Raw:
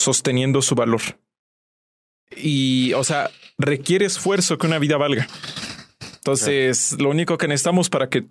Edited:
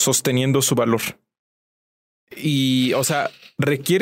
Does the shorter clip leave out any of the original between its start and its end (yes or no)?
no